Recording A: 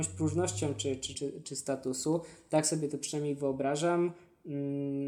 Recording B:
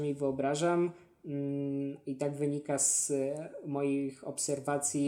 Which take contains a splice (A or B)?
A